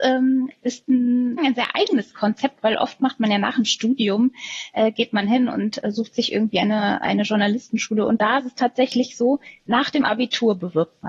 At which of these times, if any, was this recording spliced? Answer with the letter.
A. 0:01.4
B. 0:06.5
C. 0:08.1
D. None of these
A